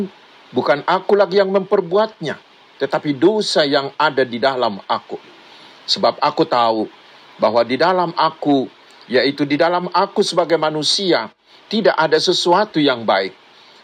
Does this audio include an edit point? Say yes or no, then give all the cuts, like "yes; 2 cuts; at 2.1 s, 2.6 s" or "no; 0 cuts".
no; 0 cuts